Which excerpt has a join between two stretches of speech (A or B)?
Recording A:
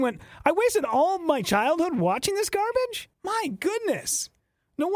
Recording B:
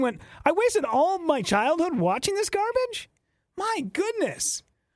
A